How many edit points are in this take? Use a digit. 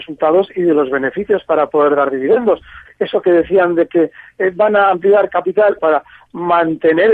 2